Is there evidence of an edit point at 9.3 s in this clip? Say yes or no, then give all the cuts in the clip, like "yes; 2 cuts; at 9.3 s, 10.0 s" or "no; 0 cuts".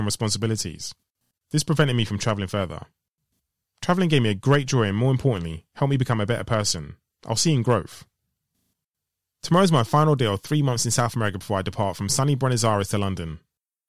yes; 1 cut; at 9.3 s